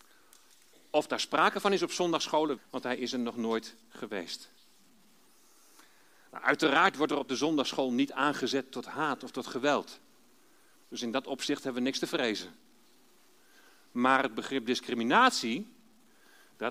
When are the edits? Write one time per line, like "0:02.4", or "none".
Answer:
0:02.6

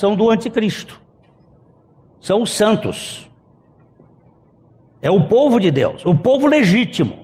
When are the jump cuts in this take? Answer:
none

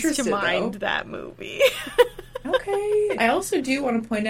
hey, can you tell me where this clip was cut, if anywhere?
0:03.2

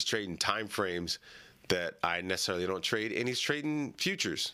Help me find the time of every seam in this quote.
none

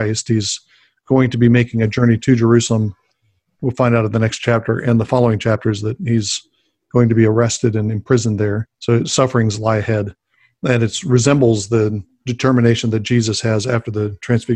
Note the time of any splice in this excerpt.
0:08.7

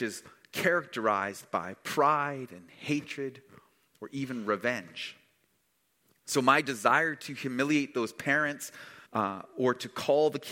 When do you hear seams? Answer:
0:09.1

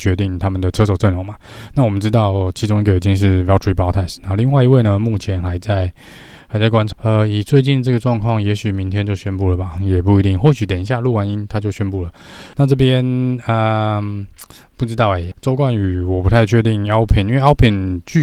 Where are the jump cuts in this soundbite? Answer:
0:06.9
0:12.5
0:15.3

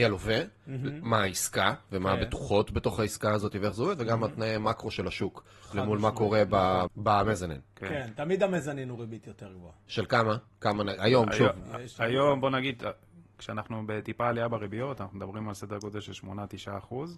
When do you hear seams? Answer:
0:06.9

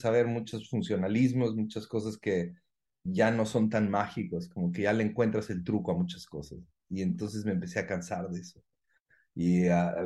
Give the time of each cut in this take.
none

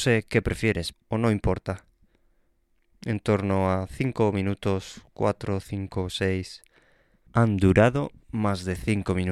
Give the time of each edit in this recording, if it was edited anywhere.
0:00.9
0:07.3

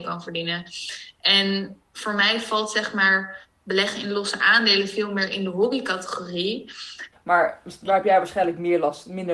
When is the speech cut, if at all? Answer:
0:07.1

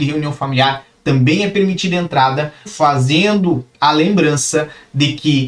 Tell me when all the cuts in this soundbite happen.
0:01.0
0:02.7

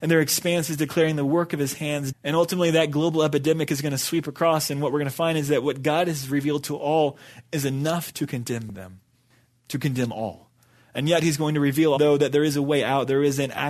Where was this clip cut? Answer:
0:02.1
0:12.0

